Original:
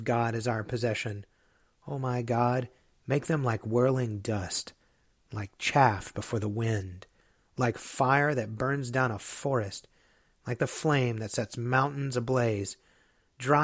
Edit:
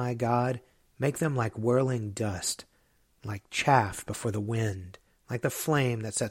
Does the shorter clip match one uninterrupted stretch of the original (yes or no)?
no